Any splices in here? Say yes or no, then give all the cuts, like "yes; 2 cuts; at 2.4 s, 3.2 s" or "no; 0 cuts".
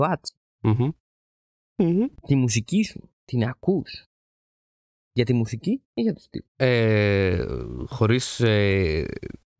yes; 1 cut; at 6.5 s